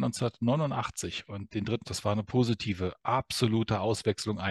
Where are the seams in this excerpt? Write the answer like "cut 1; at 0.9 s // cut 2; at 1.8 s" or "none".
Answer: cut 1; at 1.8 s